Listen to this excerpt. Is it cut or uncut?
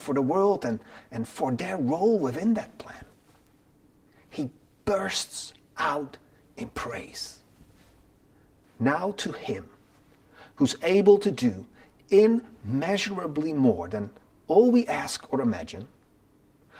cut